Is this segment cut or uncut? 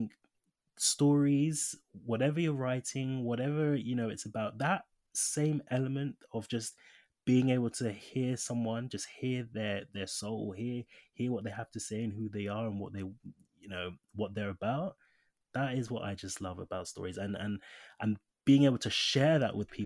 uncut